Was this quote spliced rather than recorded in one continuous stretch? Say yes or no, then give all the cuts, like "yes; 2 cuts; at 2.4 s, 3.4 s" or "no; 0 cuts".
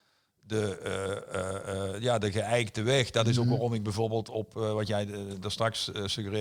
no; 0 cuts